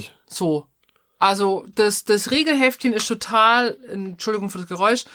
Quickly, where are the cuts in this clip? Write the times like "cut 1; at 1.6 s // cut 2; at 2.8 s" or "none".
none